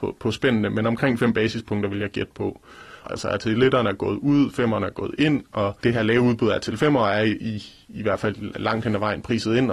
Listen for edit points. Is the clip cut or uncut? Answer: cut